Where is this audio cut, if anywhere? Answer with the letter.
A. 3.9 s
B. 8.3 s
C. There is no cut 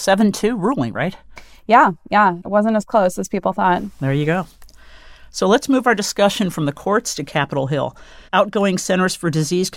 B